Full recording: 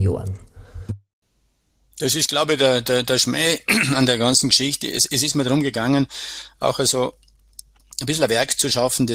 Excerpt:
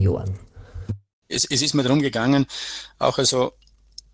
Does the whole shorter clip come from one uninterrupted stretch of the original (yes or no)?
no